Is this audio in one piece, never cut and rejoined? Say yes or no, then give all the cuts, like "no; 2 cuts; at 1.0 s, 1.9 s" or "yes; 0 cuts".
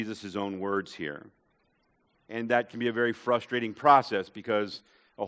no; 1 cut; at 2.1 s